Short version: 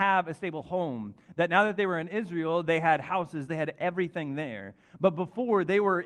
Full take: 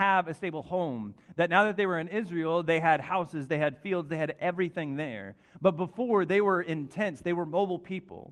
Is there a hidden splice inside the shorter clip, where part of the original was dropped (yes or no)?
yes